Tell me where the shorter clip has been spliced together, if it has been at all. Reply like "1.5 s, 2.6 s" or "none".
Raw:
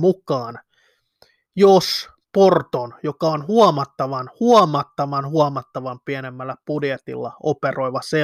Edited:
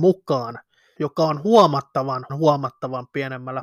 1.0 s, 2.3 s